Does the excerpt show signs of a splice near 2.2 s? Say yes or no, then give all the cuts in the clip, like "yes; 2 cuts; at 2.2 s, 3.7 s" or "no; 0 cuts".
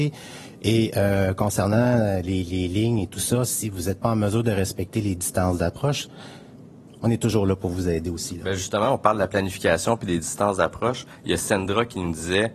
no; 0 cuts